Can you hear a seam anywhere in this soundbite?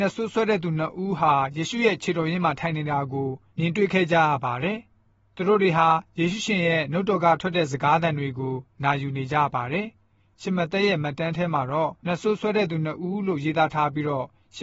yes; 1 cut; at 12.0 s

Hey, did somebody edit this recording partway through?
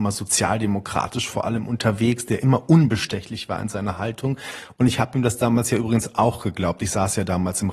no; 0 cuts

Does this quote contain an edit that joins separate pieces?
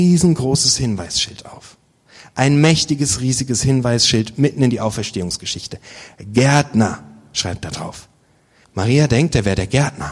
yes; 1 cut; at 8.6 s

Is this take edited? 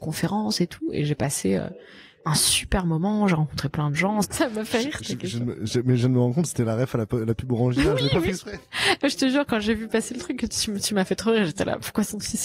yes; 1 cut; at 4.2 s

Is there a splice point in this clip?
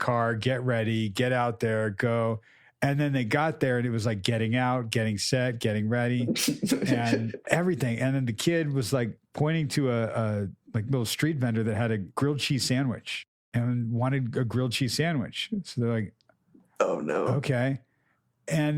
no; 0 cuts

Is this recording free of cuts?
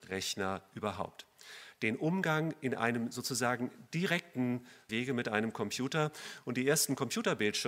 no; 1 cut; at 1.7 s

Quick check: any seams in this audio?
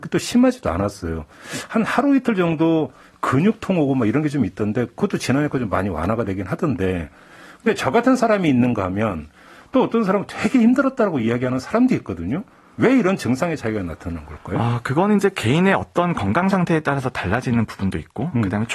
no; 0 cuts

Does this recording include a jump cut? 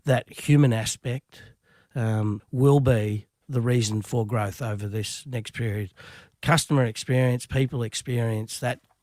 yes; 1 cut; at 2.4 s

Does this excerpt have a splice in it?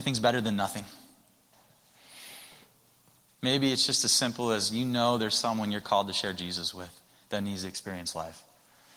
yes; 1 cut; at 3.3 s

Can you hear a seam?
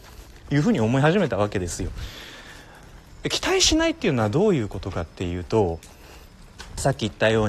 no; 0 cuts

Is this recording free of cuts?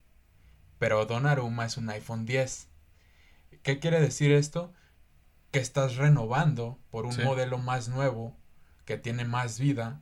yes; 0 cuts

